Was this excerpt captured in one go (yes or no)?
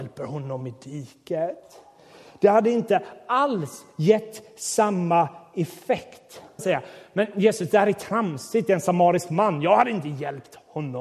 no